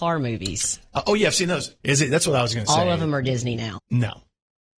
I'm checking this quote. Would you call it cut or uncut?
cut